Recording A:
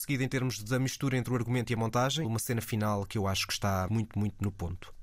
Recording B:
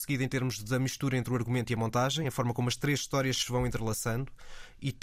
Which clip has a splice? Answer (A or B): A